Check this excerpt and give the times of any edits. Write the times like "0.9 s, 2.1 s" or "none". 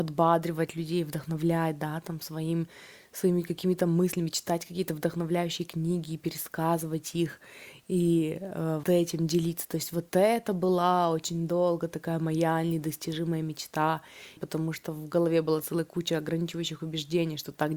8.8 s, 14.4 s